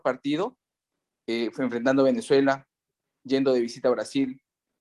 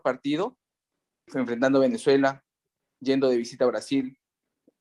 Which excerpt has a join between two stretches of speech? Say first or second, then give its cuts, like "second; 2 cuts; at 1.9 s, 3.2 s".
second; 1 cut; at 1.3 s